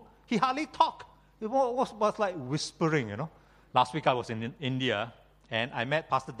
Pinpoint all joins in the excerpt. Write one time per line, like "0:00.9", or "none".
0:03.7